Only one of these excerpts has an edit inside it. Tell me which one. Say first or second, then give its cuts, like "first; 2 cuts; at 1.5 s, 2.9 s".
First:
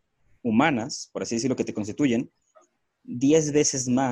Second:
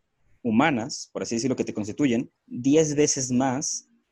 second; 1 cut; at 2.4 s